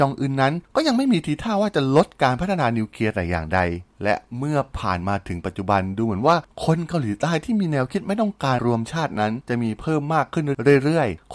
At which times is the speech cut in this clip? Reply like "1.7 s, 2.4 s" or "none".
8.6 s

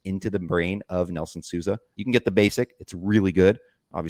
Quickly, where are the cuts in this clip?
1.9 s

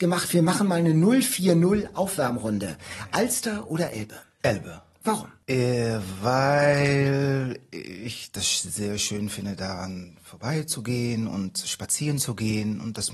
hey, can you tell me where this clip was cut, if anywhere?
none

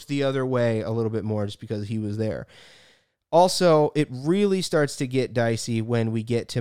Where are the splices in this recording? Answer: none

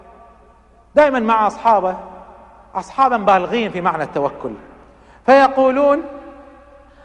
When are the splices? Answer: none

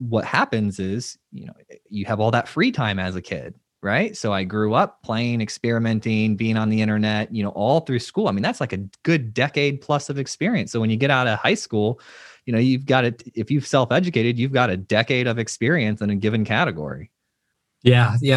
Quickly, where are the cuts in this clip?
none

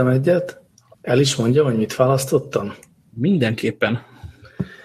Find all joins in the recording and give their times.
0.9 s

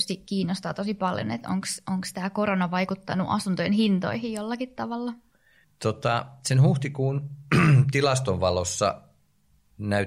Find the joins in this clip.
5.6 s

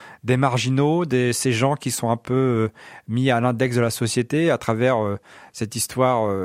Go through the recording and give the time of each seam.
none

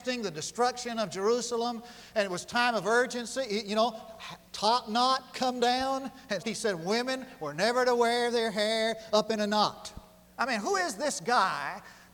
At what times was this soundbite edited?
6.4 s, 10.2 s

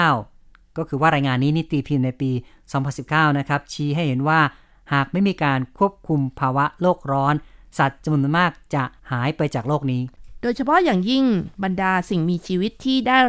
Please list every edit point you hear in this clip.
9.0 s

